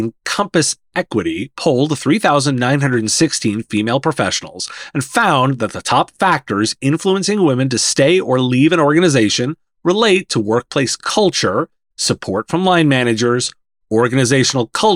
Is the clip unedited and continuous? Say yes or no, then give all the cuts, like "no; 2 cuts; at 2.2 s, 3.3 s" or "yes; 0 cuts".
no; 1 cut; at 11.9 s